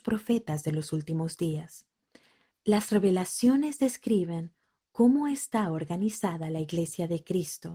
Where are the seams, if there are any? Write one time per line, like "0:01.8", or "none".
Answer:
none